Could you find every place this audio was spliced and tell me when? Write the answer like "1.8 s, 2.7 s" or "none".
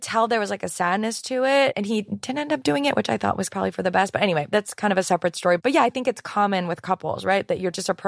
none